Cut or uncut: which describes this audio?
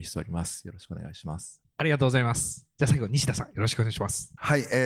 uncut